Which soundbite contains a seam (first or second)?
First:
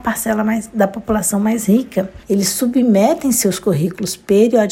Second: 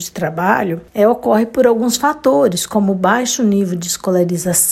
first